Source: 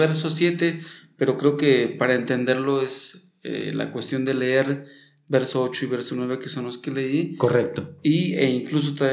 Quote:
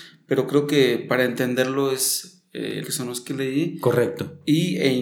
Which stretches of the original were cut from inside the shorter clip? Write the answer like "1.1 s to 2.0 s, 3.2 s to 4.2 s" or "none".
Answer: 3.7 s to 6.4 s